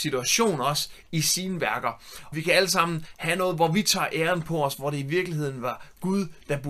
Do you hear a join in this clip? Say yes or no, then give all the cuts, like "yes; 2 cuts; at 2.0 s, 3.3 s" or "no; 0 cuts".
yes; 1 cut; at 2.3 s